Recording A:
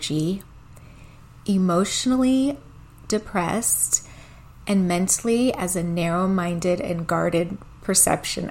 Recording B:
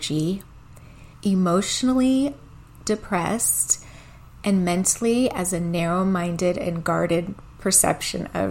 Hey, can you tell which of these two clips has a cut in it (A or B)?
B